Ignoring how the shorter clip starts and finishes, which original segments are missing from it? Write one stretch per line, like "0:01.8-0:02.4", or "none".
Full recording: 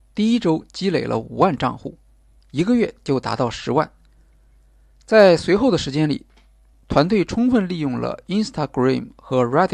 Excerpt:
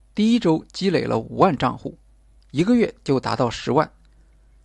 none